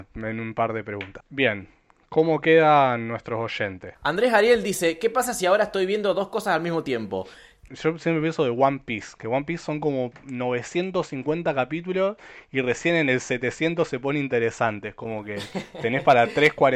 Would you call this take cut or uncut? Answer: cut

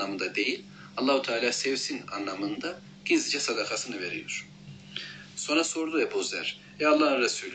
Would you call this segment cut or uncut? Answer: uncut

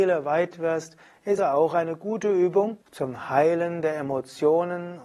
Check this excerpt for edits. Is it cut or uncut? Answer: cut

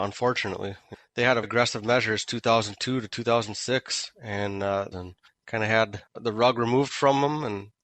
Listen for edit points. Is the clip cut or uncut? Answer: cut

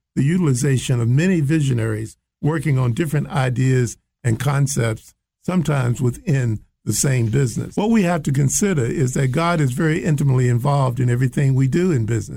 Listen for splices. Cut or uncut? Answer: uncut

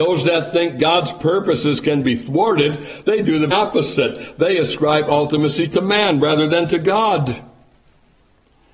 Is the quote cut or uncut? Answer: cut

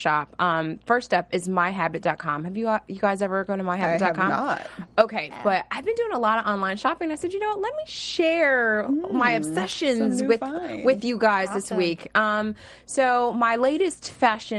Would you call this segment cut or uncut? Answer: cut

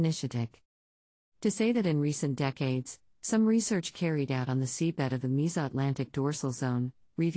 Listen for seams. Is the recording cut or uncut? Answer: uncut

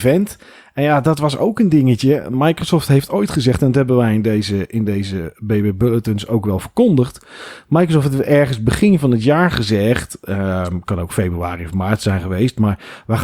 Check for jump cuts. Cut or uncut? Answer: uncut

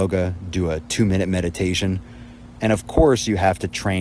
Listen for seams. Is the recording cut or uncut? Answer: cut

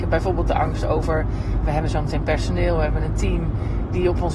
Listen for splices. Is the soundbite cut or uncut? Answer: cut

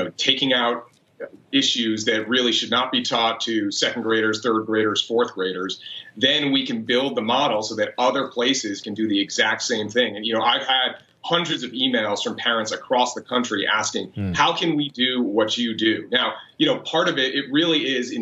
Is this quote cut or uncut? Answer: uncut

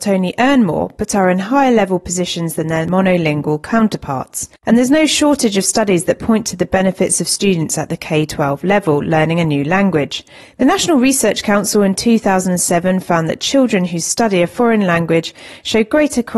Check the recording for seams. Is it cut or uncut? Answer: uncut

